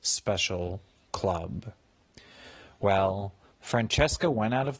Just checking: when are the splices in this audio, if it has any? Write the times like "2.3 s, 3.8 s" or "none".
3.5 s